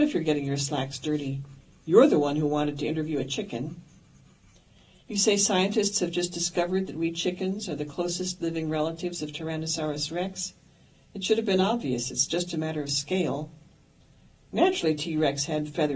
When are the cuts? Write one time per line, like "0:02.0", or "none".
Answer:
none